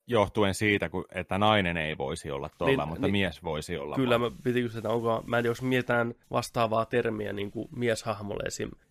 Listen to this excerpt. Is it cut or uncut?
uncut